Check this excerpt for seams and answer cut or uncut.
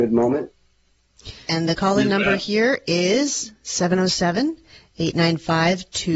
cut